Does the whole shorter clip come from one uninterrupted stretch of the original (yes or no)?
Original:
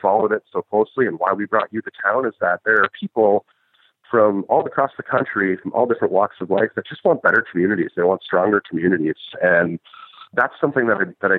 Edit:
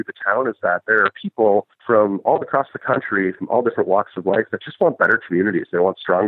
no